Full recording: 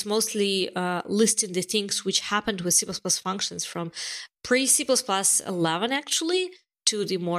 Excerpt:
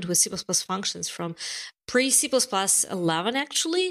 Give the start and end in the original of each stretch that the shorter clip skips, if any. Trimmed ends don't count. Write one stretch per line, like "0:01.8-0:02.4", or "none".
none